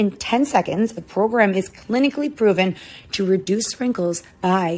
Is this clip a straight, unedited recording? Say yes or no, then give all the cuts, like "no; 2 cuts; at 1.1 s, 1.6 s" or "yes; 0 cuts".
no; 1 cut; at 0.9 s